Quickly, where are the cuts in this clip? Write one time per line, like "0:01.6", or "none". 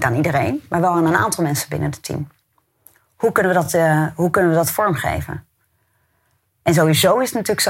none